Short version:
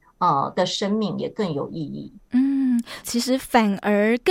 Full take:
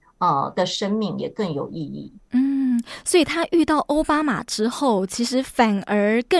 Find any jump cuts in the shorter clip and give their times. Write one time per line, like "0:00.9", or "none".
0:03.0

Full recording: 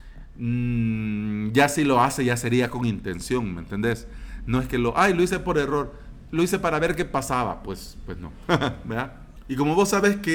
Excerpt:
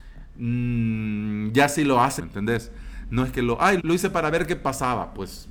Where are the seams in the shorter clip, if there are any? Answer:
0:02.2
0:03.8

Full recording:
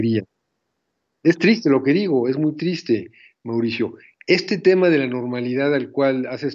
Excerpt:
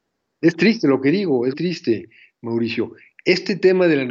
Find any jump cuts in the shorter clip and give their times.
0:01.5

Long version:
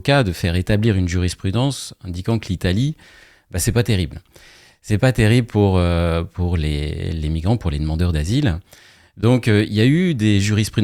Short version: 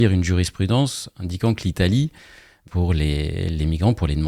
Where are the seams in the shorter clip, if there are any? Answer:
0:02.7

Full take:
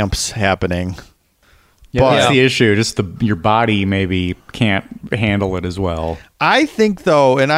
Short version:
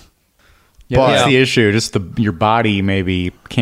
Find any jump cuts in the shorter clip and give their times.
none

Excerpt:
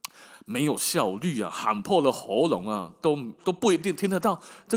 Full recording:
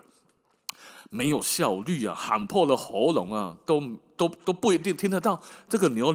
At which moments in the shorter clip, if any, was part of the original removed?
0:03.4

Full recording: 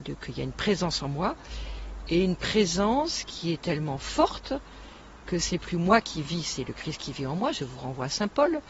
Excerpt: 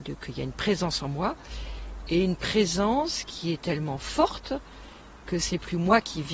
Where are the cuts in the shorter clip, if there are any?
none

